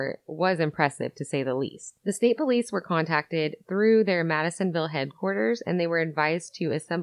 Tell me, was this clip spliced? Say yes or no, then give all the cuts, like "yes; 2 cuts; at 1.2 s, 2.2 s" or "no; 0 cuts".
no; 0 cuts